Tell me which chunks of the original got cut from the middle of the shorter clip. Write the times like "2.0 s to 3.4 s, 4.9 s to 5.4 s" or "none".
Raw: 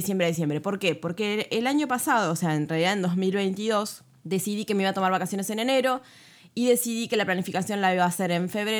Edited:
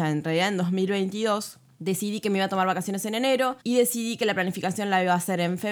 6.0 s to 6.5 s